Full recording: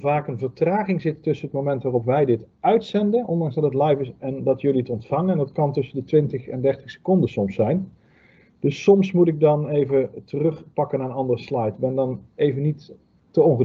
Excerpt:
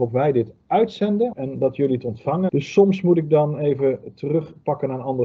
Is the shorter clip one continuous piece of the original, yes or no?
no